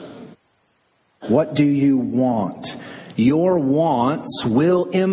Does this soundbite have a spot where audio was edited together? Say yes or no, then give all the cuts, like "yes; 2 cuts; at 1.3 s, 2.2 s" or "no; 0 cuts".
no; 0 cuts